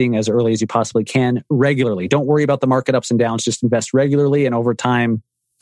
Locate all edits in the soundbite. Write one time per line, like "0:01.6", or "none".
none